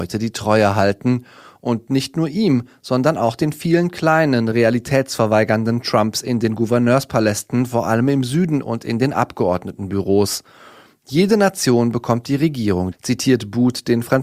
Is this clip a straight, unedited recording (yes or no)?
no